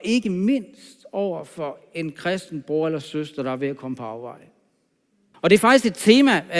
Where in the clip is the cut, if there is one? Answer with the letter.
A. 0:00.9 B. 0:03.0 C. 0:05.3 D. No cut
C